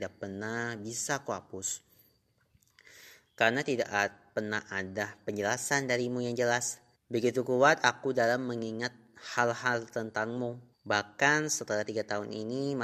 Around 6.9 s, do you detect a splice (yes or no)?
yes